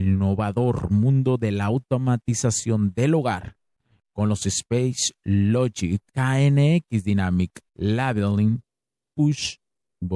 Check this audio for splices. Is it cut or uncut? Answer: cut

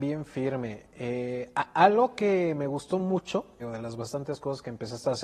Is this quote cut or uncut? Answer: cut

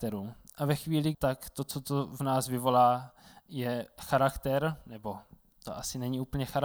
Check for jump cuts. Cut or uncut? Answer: cut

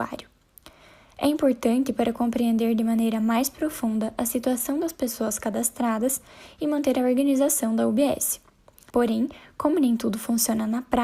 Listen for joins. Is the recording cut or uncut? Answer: cut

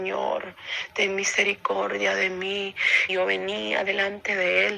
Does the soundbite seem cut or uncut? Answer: cut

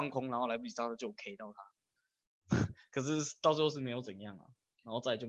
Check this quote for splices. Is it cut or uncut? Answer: uncut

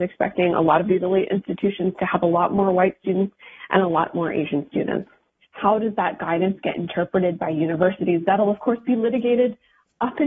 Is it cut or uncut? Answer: cut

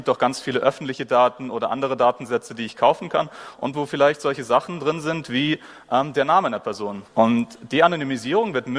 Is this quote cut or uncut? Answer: cut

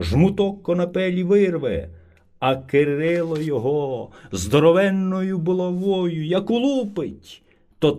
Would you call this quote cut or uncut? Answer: uncut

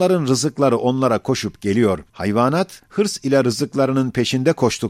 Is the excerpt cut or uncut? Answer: cut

